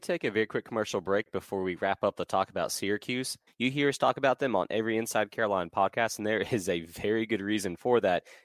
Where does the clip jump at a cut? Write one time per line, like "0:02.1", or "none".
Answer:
0:03.5